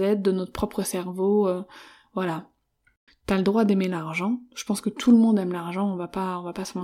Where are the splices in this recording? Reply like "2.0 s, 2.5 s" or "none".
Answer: 3.1 s